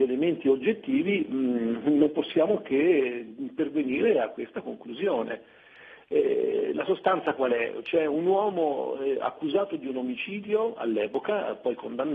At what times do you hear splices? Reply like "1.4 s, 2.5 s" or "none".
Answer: none

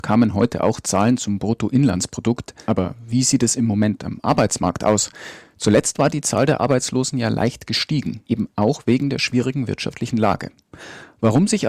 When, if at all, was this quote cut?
2.6 s, 8.2 s

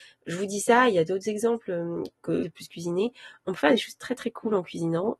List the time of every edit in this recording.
2.4 s

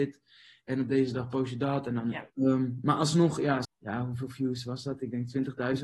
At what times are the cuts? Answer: 2.3 s, 3.6 s

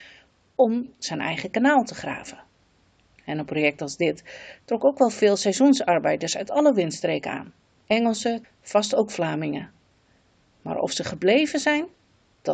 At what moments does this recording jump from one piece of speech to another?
8.4 s

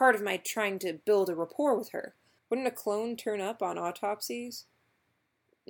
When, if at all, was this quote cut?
2.4 s

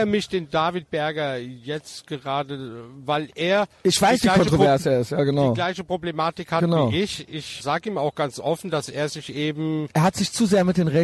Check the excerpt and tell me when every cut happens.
7.6 s

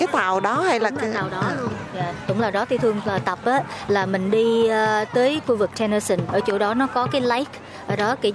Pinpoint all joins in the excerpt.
none

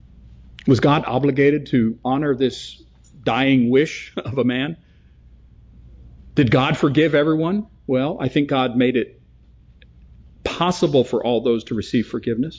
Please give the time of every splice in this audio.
none

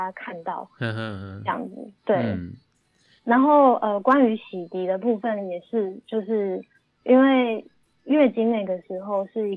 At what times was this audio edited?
none

